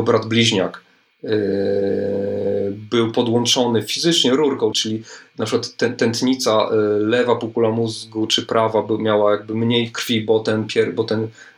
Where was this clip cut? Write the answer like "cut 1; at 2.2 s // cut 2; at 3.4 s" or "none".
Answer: cut 1; at 4.7 s